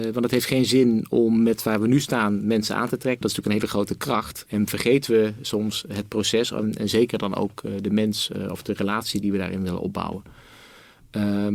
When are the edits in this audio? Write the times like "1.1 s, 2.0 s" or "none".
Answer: 3.2 s, 4.5 s